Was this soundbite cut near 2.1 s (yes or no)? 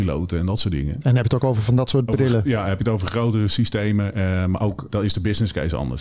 yes